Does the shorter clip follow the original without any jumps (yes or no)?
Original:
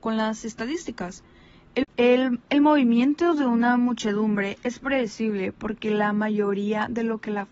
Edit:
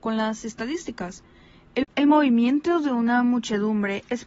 no